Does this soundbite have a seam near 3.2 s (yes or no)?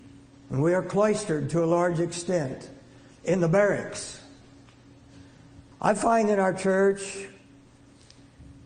no